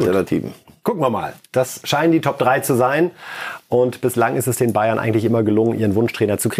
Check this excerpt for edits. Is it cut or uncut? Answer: uncut